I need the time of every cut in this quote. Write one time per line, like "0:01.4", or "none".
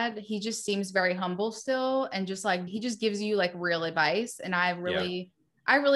0:02.7